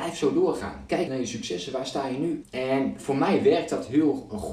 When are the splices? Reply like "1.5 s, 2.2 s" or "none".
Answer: 1.1 s, 2.4 s

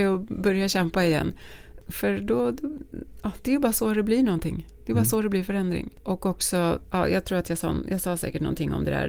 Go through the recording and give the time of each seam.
none

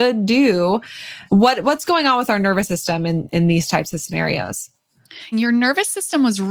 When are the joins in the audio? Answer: 1.3 s, 5.3 s

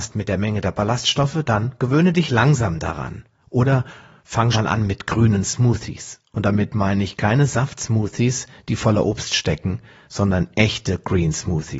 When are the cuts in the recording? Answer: 4.5 s

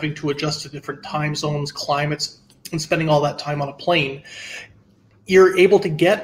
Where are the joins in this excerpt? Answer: none

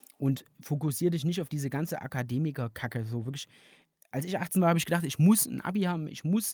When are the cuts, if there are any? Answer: none

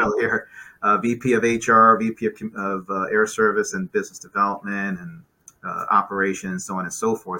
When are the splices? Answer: none

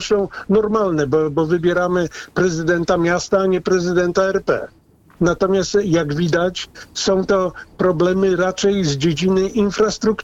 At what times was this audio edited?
5.2 s

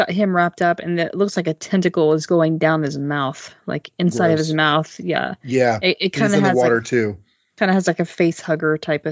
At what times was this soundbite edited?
none

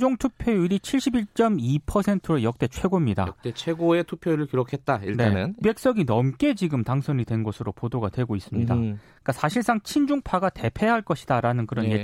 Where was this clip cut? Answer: 5.6 s

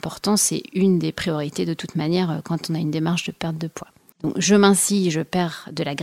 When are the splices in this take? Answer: 4.1 s

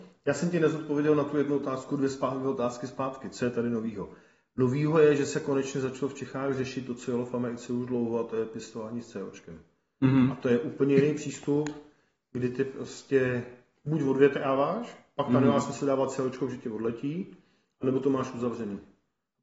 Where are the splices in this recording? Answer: none

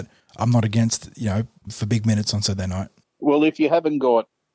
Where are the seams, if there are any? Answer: 1.7 s

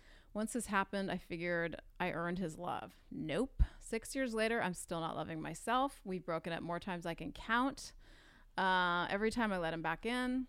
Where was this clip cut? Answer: none

